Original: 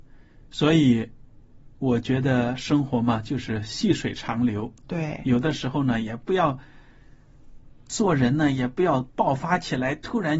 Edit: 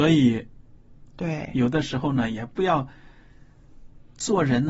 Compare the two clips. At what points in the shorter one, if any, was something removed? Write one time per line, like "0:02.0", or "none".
0:01.1